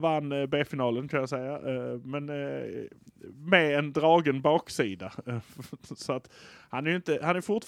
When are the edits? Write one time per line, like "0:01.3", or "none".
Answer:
none